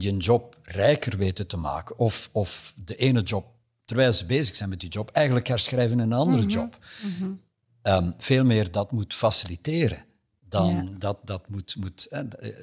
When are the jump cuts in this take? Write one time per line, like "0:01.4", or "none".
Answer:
0:08.2